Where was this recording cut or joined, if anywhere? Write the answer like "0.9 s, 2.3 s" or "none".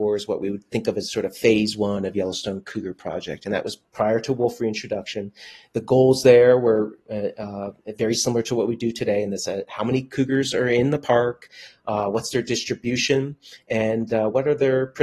none